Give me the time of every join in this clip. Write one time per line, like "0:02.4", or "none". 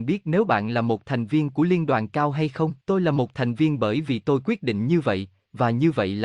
0:02.8